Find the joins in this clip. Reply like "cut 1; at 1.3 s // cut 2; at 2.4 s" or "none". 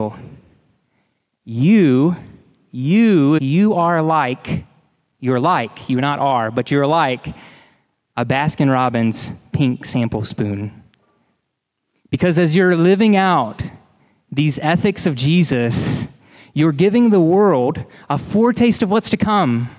cut 1; at 3.4 s